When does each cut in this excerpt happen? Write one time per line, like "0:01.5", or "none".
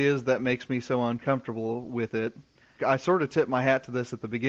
0:02.8